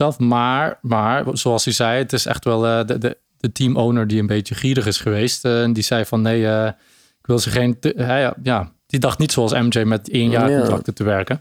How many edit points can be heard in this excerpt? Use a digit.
0